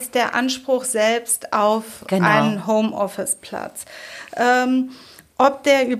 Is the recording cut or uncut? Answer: uncut